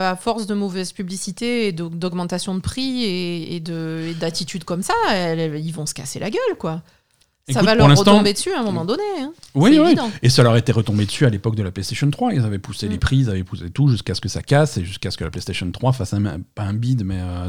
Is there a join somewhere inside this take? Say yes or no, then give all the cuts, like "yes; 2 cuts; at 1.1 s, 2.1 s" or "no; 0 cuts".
no; 0 cuts